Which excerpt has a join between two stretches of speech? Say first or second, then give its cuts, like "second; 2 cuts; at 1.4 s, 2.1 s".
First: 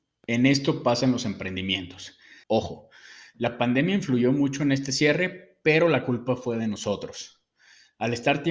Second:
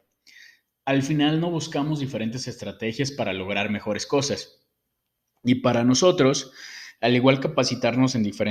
first; 1 cut; at 2.4 s